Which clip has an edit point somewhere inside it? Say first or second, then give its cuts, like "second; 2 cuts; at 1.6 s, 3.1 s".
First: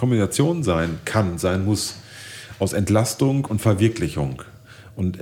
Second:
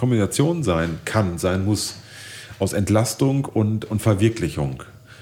first; 1 cut; at 3.5 s